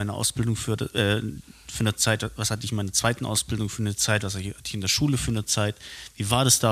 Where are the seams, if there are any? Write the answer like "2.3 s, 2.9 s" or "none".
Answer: 5.5 s

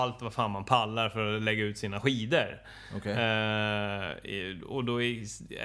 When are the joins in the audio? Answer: none

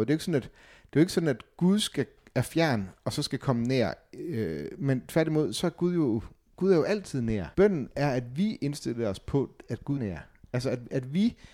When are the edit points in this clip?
7.5 s, 10.0 s

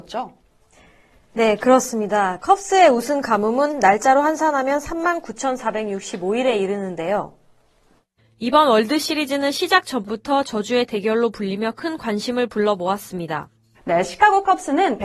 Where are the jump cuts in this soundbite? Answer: 13.7 s

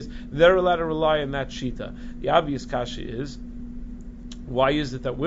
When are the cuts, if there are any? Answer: none

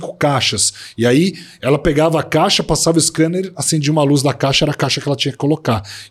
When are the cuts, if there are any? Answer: none

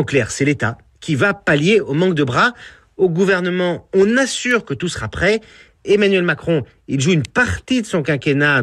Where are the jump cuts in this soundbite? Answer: 5.7 s

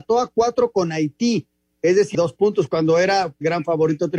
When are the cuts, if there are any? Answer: 2.1 s

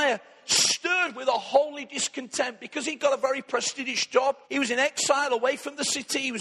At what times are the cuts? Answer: 4.4 s

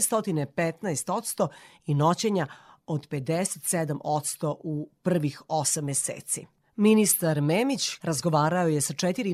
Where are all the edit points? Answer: 8.0 s

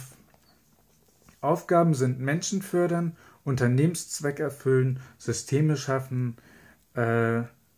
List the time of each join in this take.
none

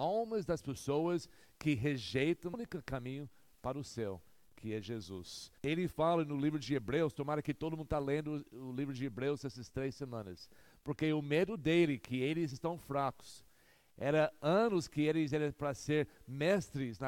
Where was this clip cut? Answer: 2.5 s, 5.6 s

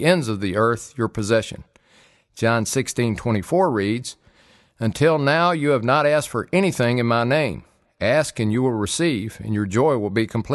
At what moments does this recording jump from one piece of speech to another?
none

